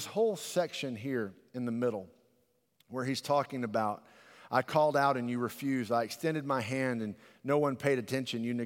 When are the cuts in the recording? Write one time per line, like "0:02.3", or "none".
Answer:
none